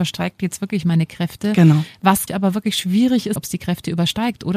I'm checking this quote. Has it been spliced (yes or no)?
yes